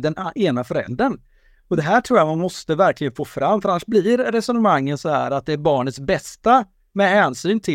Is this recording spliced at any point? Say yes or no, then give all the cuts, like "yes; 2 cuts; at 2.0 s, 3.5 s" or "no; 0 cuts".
no; 0 cuts